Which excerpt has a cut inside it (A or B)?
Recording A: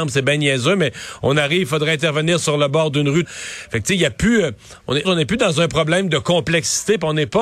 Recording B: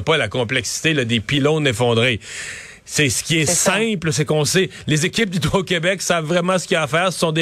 A